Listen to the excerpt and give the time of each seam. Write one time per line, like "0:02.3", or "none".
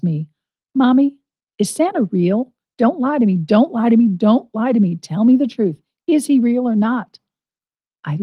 none